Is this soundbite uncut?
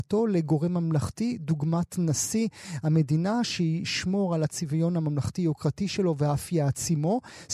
yes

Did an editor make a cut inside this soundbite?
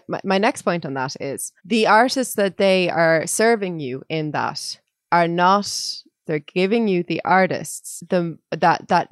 yes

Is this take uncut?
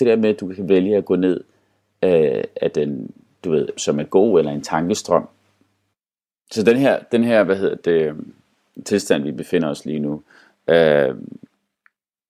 no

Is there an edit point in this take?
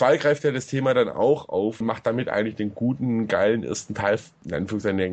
no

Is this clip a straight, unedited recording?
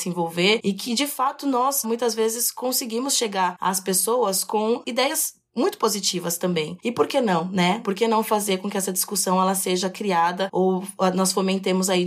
no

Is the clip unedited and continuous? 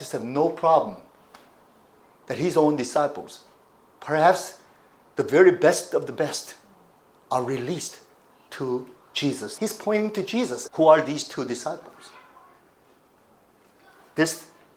no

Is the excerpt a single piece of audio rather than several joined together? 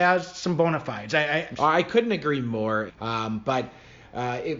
no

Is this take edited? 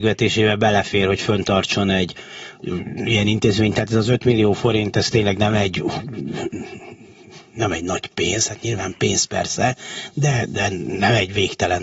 no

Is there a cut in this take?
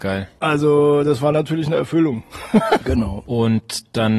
yes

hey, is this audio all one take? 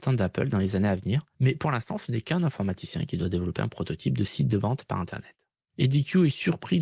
yes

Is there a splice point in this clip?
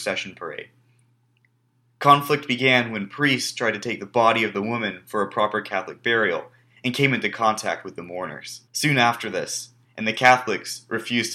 yes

